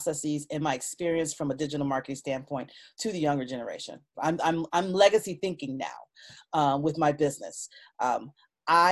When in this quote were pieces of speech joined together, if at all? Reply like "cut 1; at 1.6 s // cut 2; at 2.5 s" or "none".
cut 1; at 4.1 s